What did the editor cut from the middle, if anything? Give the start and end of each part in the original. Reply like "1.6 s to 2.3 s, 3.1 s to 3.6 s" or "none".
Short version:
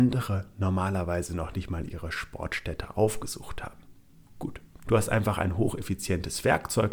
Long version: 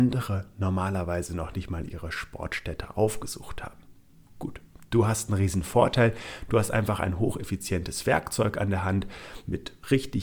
4.8 s to 6.5 s